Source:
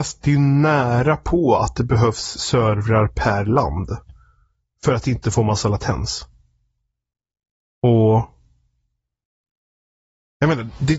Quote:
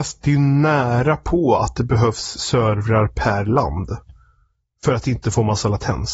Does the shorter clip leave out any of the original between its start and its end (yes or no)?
no